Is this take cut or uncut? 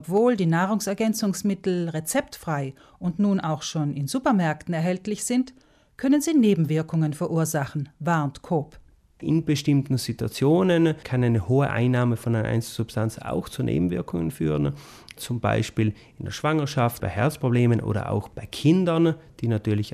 cut